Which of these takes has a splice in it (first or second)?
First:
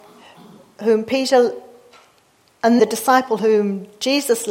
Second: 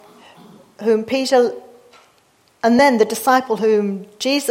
first